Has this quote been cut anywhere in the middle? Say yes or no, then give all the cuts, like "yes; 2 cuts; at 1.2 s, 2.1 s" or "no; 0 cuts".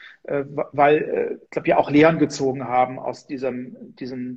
yes; 1 cut; at 1.5 s